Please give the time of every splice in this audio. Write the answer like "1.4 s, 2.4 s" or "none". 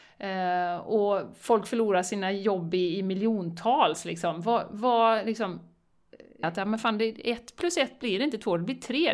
6.4 s